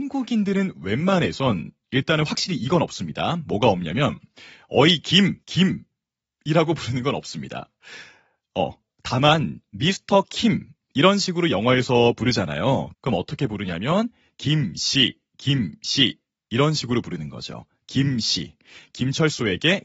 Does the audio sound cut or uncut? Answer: cut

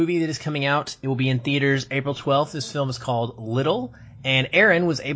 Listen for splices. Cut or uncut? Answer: uncut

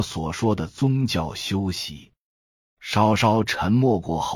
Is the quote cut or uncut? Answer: uncut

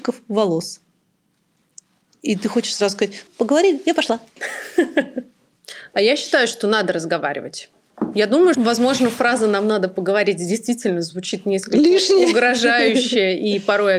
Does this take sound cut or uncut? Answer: cut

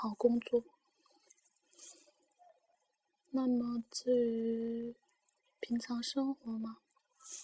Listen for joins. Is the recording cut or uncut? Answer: uncut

